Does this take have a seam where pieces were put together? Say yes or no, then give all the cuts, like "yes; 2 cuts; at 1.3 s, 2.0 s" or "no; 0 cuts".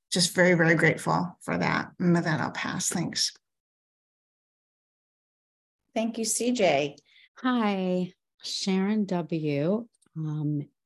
yes; 1 cut; at 7.2 s